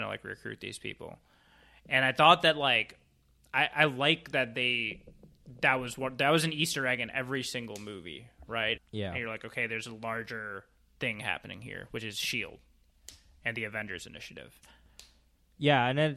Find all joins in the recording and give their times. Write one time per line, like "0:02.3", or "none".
0:08.8